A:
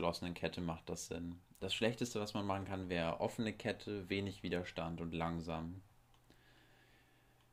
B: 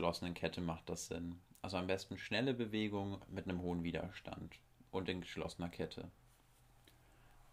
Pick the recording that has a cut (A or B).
A